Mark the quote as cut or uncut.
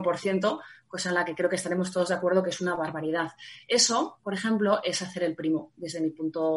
uncut